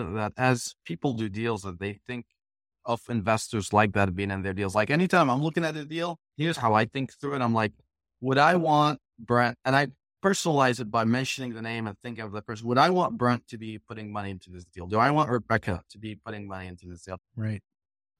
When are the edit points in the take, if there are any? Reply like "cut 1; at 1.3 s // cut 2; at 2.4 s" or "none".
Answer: cut 1; at 9.6 s // cut 2; at 17.2 s